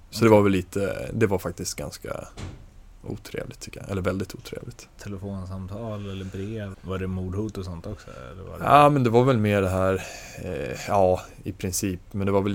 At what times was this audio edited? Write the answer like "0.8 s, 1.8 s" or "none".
6.7 s